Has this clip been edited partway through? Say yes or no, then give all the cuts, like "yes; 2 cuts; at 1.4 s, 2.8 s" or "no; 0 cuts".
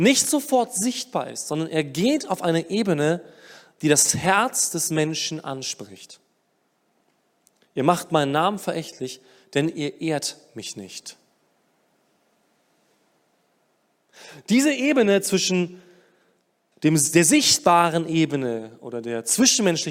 no; 0 cuts